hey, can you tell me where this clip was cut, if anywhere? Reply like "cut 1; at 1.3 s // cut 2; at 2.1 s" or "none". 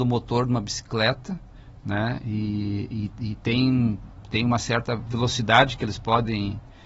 none